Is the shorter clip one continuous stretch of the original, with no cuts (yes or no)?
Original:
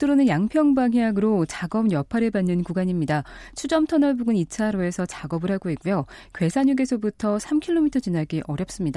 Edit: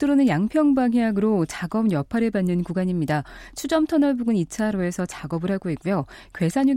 yes